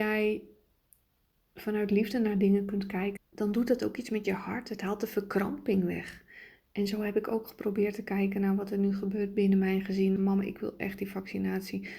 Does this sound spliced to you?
yes; 2 cuts; at 3.2 s, 10.2 s

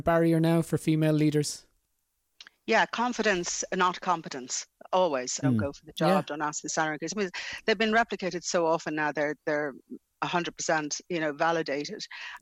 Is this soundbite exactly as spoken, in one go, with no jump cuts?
no; 1 cut; at 5.4 s

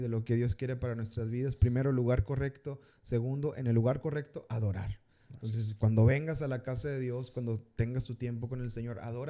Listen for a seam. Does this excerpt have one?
no; 0 cuts

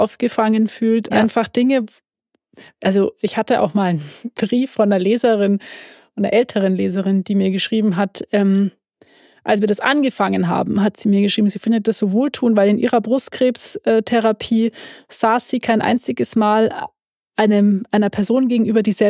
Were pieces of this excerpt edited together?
yes; 1 cut; at 1.1 s

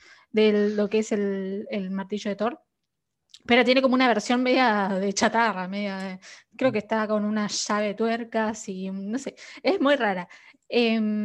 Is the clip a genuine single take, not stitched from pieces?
yes; 0 cuts

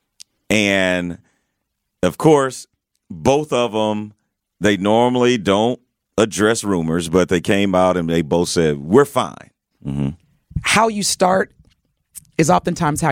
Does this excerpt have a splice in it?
yes; 1 cut; at 9.7 s

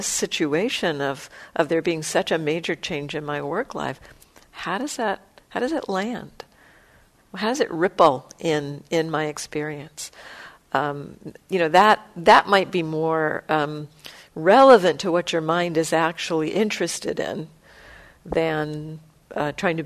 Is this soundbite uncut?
yes; 0 cuts

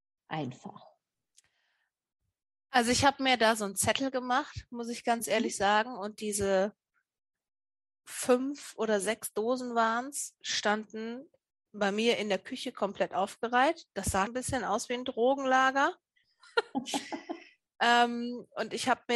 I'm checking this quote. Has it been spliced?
yes; 1 cut; at 14.3 s

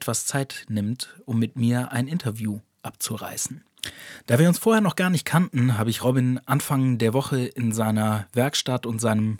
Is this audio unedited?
yes; 0 cuts

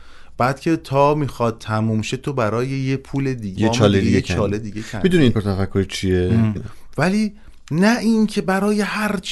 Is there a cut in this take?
yes; 3 cuts; at 3.6 s, 5.3 s, 6.6 s

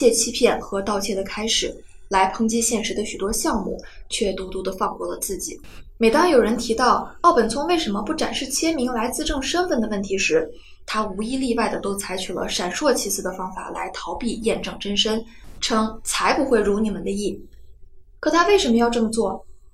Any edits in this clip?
no; 0 cuts

